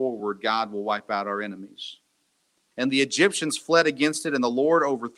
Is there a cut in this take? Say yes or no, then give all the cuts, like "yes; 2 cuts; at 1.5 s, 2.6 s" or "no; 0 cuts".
yes; 1 cut; at 2.7 s